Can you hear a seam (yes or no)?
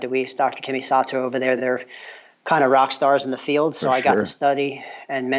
no